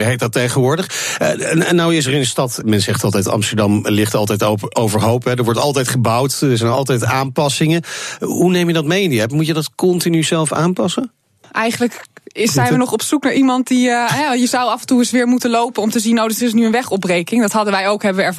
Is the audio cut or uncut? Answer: cut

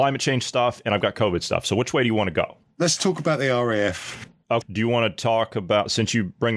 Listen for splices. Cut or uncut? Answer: cut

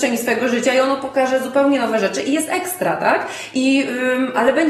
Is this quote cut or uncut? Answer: uncut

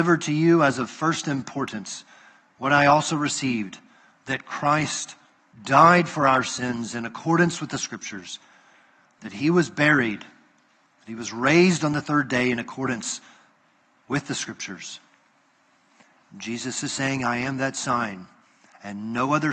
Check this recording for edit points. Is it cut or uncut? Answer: uncut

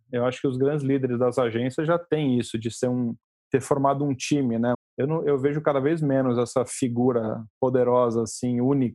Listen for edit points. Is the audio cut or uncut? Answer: cut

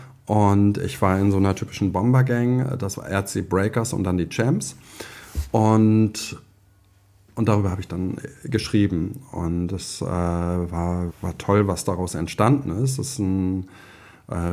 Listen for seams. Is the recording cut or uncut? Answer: cut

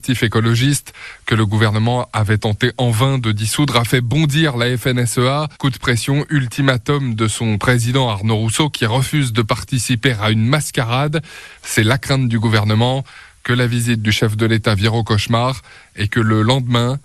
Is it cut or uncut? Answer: cut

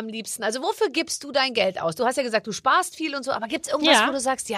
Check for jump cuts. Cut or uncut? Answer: uncut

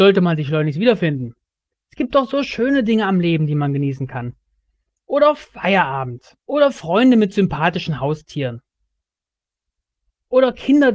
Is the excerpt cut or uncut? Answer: cut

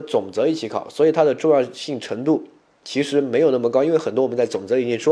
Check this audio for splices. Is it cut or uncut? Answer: uncut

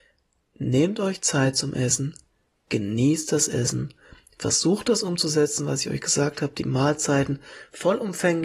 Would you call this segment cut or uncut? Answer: uncut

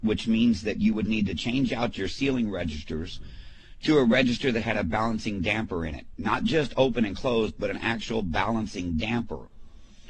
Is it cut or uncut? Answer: uncut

